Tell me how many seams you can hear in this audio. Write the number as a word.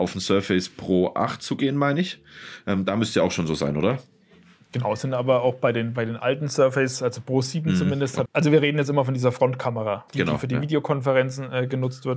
two